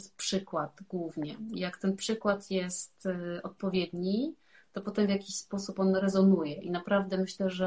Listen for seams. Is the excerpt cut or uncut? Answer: uncut